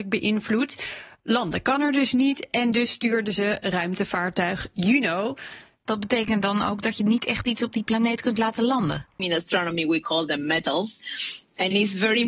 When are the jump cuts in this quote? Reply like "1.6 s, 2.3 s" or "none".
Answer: 5.9 s, 9.2 s